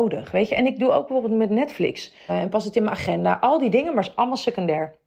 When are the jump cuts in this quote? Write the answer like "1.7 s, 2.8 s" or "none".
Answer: 2.3 s